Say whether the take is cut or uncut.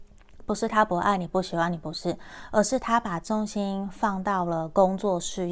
uncut